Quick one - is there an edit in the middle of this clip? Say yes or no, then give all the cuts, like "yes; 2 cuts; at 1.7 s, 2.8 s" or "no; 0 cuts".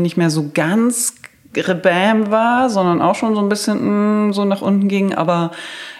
no; 0 cuts